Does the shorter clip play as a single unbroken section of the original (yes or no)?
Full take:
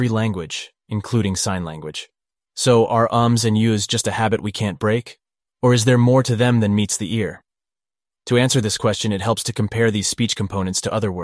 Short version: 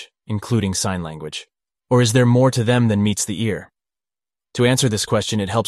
no